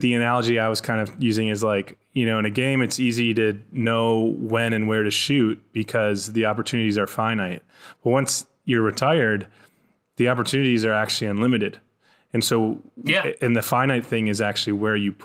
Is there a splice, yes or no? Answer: no